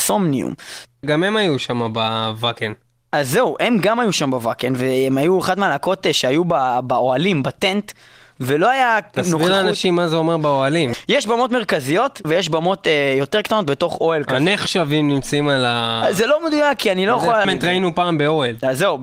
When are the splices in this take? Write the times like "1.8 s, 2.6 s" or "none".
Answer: 12.2 s, 17.4 s